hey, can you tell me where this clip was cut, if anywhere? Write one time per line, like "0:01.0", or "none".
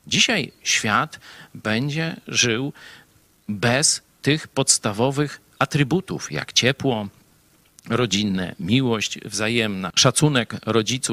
none